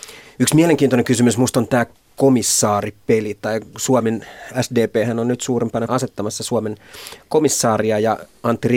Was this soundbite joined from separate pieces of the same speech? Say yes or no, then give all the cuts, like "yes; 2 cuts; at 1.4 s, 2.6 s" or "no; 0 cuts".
yes; 1 cut; at 5.9 s